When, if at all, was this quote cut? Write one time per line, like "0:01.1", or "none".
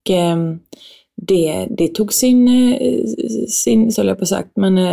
0:03.9